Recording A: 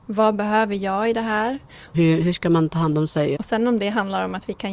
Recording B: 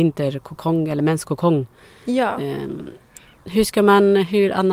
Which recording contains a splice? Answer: A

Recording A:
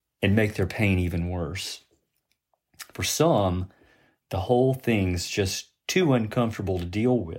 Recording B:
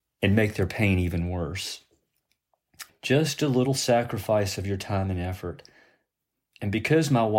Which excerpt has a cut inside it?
B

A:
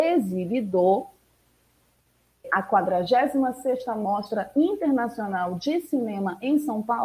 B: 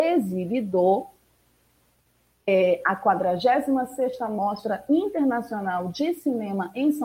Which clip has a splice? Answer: A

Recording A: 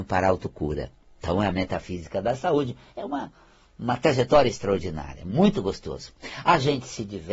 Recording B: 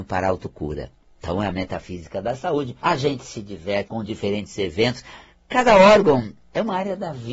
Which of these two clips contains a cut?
B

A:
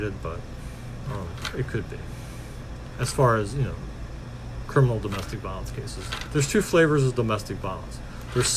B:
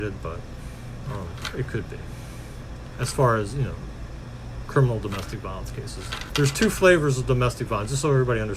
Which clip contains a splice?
A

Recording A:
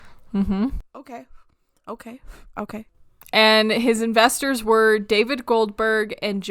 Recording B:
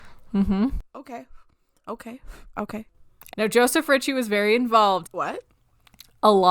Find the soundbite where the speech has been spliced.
B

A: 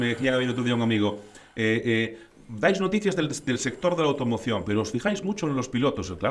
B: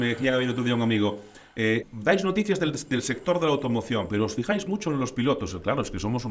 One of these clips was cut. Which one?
B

